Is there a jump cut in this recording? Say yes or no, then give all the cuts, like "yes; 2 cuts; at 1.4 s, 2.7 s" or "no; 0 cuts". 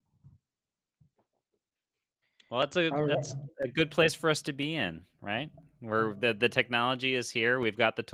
no; 0 cuts